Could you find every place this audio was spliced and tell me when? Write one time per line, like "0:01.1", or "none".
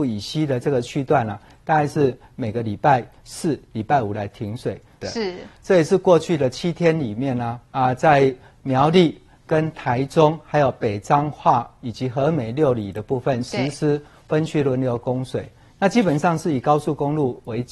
0:05.0
0:07.7